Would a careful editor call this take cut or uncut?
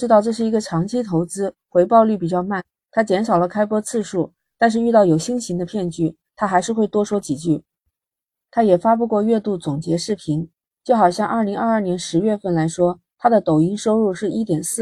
uncut